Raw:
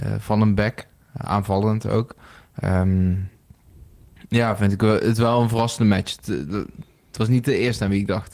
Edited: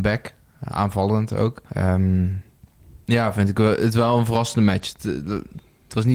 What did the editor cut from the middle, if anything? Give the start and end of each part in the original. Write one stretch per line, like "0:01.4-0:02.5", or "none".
0:02.2-0:02.5
0:03.9-0:04.3